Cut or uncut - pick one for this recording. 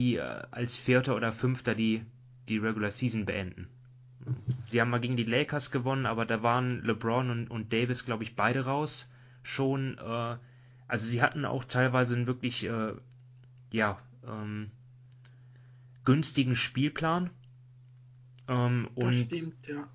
cut